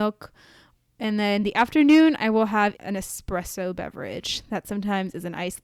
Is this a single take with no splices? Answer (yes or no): no